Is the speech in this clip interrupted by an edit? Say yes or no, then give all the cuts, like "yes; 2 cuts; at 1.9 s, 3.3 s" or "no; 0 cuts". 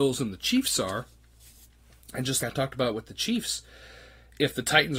yes; 1 cut; at 2.4 s